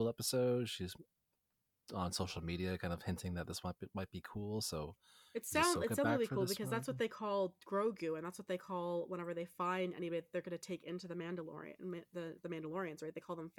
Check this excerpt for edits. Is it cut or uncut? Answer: uncut